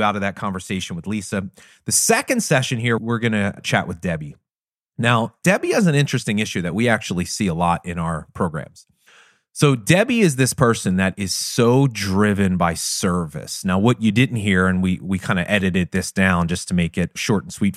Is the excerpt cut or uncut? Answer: uncut